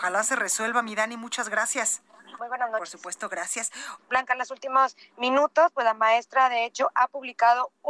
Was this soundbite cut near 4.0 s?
yes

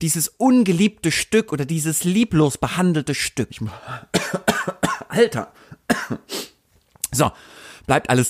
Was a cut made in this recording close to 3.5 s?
yes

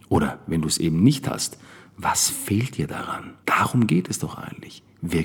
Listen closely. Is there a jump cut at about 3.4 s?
yes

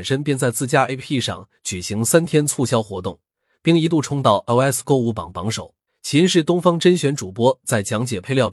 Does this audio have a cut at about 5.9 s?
yes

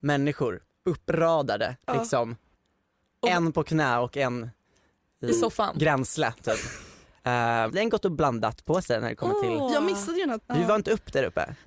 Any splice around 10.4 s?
yes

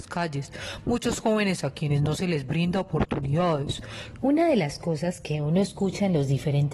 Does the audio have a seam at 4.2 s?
yes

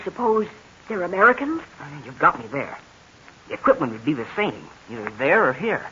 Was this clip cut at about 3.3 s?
no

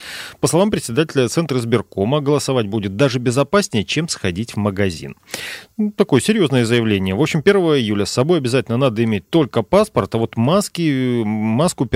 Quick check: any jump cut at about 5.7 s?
no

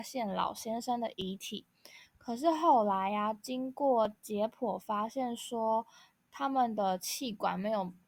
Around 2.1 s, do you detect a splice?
yes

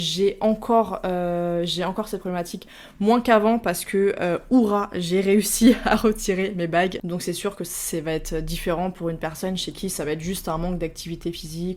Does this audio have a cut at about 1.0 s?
no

